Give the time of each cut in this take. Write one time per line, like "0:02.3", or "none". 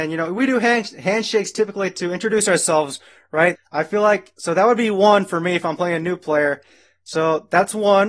0:03.6